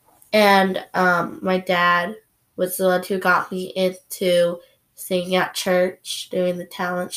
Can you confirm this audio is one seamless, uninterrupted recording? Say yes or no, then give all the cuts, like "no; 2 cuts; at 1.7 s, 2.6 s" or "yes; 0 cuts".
yes; 0 cuts